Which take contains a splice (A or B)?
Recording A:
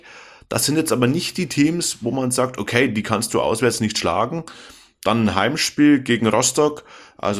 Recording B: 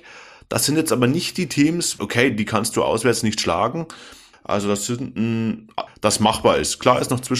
B